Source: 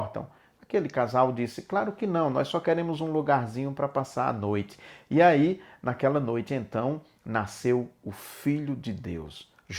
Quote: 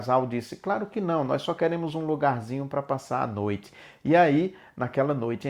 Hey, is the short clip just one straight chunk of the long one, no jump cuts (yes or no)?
yes